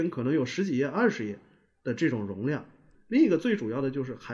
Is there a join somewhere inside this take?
yes; 1 cut; at 2.9 s

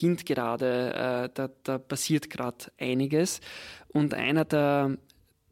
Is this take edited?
no; 0 cuts

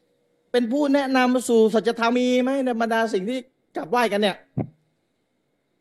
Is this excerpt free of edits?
no; 1 cut; at 2.1 s

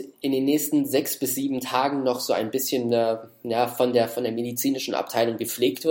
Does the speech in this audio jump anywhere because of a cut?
no; 0 cuts

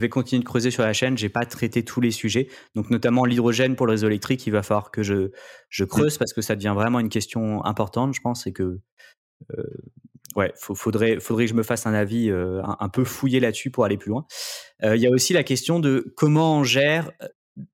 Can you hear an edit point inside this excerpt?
no; 0 cuts

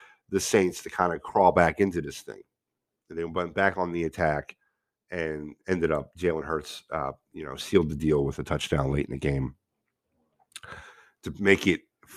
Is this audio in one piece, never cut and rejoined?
no; 1 cut; at 3.0 s

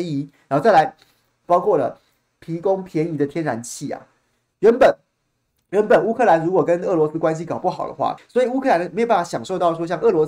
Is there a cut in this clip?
yes; 2 cuts; at 1.4 s, 8.2 s

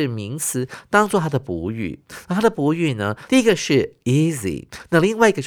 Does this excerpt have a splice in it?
yes; 1 cut; at 3.3 s

